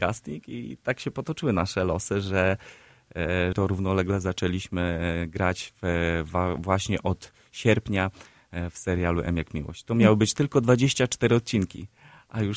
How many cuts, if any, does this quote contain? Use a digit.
1